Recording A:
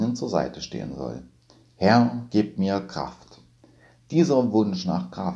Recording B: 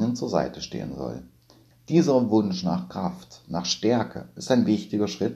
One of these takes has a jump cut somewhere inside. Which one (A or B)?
B